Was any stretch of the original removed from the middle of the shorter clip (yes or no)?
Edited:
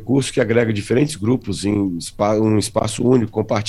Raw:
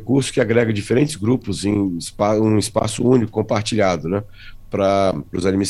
no